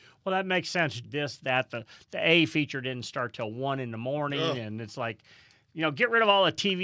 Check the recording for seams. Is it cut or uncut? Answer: cut